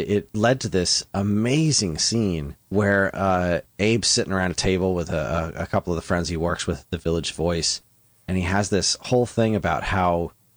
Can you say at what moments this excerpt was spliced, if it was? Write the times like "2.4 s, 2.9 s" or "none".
2.6 s